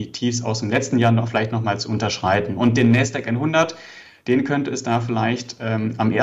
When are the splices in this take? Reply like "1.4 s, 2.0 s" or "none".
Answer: none